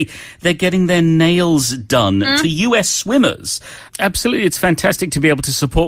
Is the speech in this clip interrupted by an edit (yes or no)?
yes